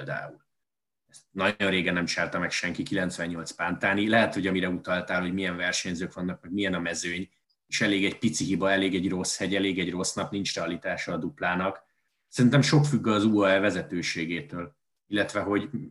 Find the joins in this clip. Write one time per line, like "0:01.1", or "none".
0:00.9